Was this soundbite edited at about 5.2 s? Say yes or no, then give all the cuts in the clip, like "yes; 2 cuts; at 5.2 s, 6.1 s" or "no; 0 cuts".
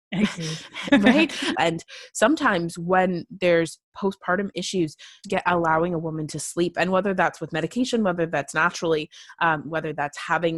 yes; 2 cuts; at 1.5 s, 5.2 s